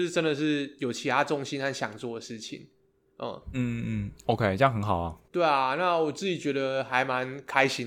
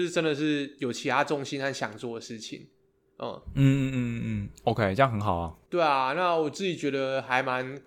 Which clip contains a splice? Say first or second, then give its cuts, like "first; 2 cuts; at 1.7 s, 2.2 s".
first; 1 cut; at 3.5 s